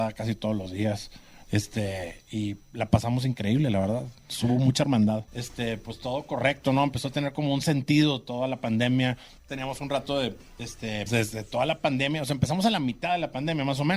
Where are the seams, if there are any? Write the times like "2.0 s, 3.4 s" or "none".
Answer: 5.3 s, 9.4 s, 11.1 s